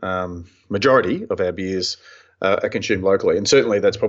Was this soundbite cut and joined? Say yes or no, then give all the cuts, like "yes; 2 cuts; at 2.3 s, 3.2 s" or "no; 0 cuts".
no; 0 cuts